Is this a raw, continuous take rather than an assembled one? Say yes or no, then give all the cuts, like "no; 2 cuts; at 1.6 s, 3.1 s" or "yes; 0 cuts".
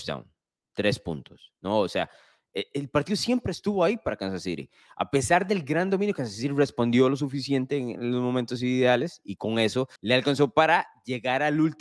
no; 1 cut; at 10.0 s